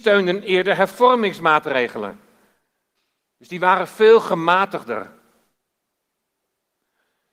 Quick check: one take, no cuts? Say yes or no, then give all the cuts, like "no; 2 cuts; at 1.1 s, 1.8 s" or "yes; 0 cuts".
yes; 0 cuts